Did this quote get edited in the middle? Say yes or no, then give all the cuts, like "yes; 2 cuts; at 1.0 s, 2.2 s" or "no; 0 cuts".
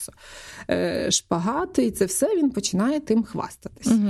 no; 0 cuts